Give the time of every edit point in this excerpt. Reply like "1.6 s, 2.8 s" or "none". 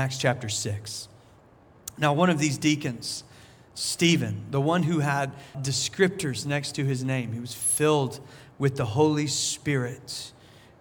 5.5 s

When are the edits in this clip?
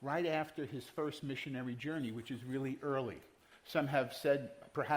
3.5 s

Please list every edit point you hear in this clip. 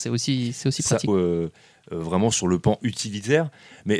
1.1 s

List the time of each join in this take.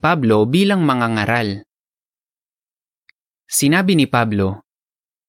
3.4 s

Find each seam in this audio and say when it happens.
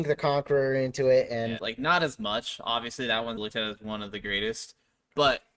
1.6 s, 3.4 s

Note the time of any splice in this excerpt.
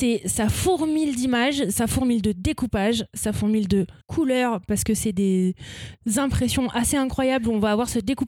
4.0 s

